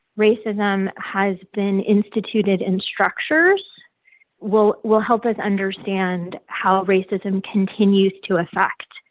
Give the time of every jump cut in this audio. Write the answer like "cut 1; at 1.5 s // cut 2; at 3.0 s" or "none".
cut 1; at 4.4 s

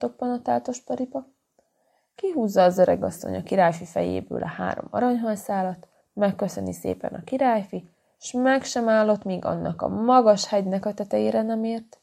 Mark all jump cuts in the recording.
cut 1; at 6.0 s

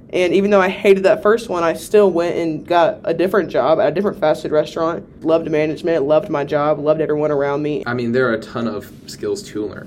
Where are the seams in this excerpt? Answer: cut 1; at 5.2 s // cut 2; at 7.8 s

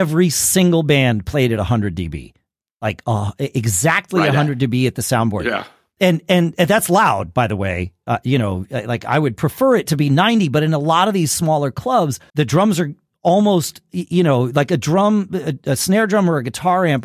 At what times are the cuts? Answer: cut 1; at 12.3 s

